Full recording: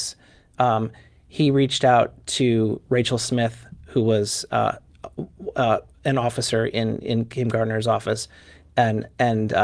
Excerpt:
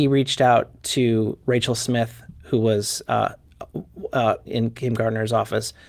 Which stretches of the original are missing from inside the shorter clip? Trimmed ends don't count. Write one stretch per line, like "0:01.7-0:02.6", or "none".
0:05.9-0:07.0